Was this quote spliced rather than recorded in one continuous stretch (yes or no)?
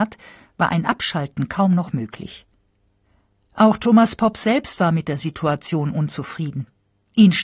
no